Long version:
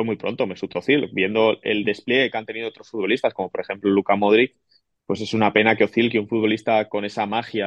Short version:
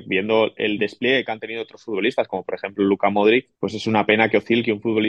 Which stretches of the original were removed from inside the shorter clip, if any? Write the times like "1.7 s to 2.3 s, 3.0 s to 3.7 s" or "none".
4.6 s to 5.0 s